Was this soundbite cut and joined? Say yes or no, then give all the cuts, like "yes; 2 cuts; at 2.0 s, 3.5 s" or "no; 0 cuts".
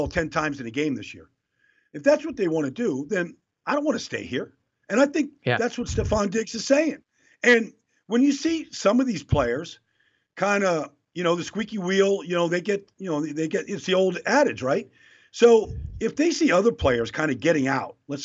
no; 0 cuts